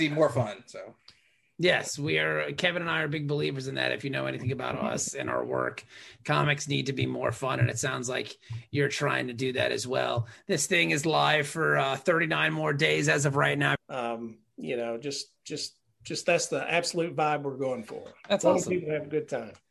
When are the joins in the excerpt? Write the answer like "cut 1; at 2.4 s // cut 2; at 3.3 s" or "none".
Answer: cut 1; at 13.8 s

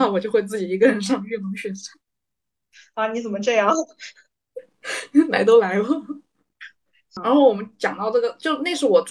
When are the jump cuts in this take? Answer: none

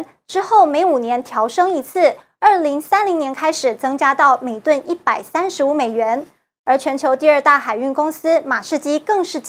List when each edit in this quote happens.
none

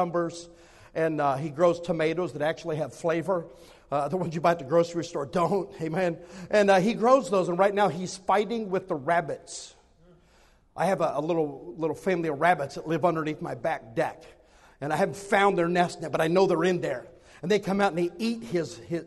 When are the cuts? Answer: none

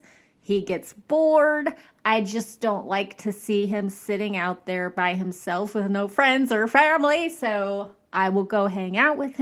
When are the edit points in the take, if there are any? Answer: none

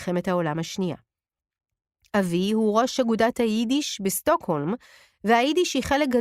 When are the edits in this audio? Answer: none

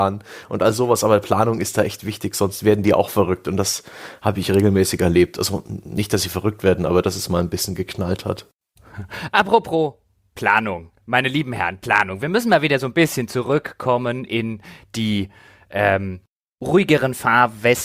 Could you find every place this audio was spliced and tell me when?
none

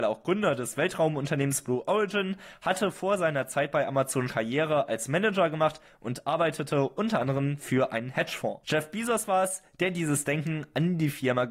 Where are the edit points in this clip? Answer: cut 1; at 4.3 s // cut 2; at 8.6 s

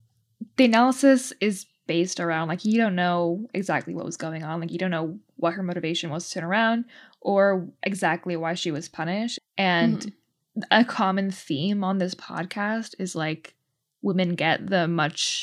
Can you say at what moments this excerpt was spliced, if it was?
cut 1; at 9.4 s

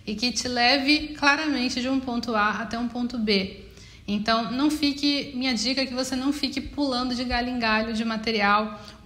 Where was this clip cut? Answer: none

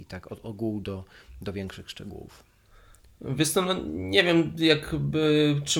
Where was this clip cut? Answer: none

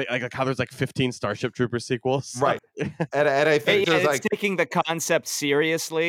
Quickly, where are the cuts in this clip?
cut 1; at 2.6 s

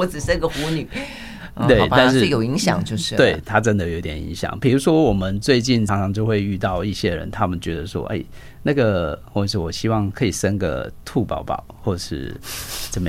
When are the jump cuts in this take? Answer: cut 1; at 5.9 s

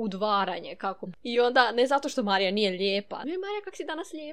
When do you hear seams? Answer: cut 1; at 1.1 s // cut 2; at 3.2 s

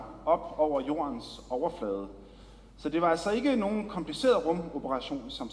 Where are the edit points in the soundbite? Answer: none

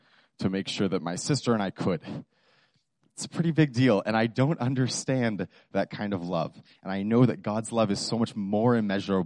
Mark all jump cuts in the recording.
none

